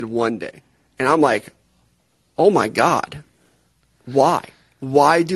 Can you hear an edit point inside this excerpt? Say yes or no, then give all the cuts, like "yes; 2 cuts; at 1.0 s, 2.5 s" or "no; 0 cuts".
no; 0 cuts